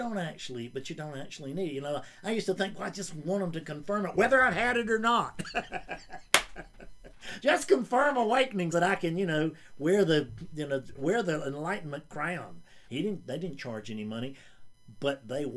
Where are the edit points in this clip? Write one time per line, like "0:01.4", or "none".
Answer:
0:08.7
0:11.0
0:12.9

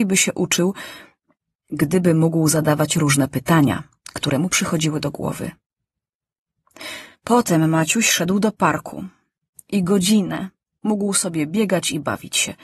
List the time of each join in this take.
0:07.1

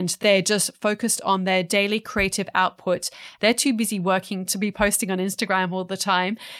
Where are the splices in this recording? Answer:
0:03.4

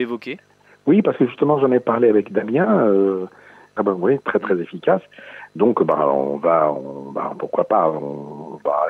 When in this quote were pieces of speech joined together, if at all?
0:03.8

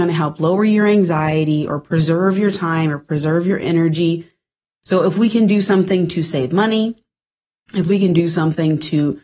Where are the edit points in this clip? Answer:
0:04.8

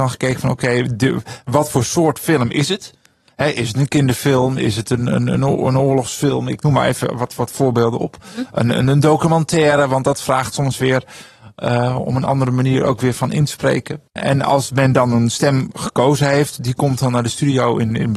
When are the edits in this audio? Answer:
none

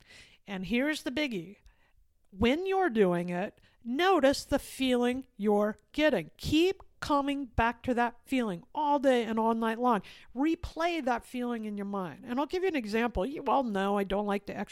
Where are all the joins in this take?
none

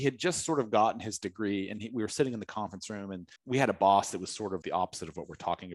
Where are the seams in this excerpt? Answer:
0:03.4
0:04.6

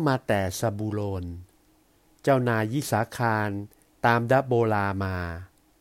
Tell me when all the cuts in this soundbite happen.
none

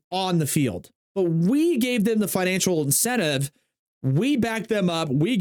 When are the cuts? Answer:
none

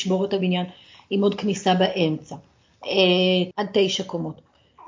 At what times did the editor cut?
0:03.5

